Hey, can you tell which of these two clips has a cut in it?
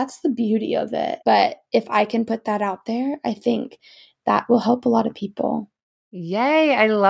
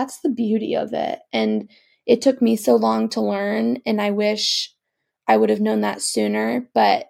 first; 1 cut; at 1.2 s

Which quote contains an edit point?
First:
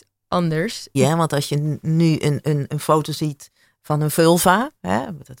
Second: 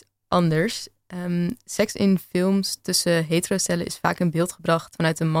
first; 2 cuts; at 0.9 s, 2.7 s

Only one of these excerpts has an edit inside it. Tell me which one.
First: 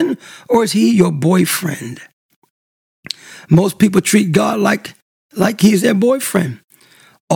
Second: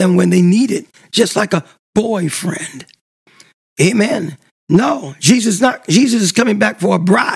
second; 1 cut; at 4.5 s

